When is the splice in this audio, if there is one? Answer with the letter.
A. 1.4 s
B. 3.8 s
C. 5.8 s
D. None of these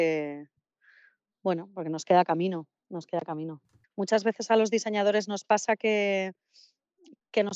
B